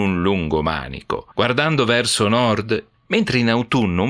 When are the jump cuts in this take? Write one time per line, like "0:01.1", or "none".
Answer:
0:01.3
0:02.9